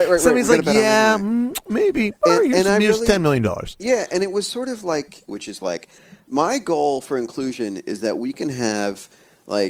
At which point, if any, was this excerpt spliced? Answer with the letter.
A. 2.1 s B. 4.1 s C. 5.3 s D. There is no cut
C